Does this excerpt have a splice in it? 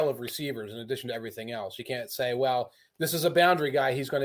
no; 0 cuts

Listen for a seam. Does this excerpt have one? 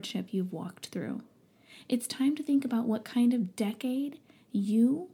no; 0 cuts

